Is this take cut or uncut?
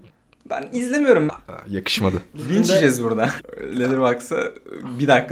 cut